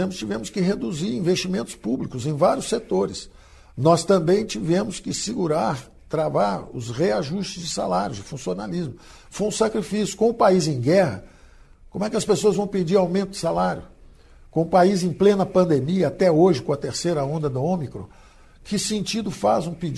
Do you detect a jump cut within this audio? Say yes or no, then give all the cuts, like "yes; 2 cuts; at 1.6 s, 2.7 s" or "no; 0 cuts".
no; 0 cuts